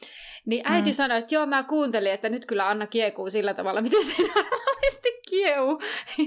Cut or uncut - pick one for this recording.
uncut